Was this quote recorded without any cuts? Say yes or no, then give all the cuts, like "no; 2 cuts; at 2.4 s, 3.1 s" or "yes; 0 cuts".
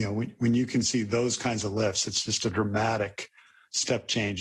yes; 0 cuts